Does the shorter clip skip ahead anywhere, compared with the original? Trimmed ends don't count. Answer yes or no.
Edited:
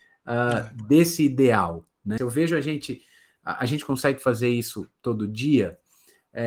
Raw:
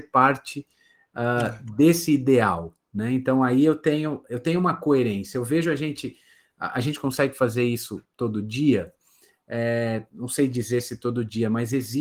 yes